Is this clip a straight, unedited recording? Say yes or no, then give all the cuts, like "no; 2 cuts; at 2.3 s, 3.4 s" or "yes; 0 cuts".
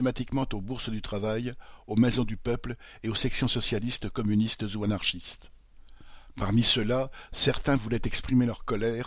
no; 1 cut; at 6.3 s